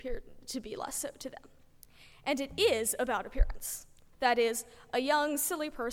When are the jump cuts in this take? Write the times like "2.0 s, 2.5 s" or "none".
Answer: 4.1 s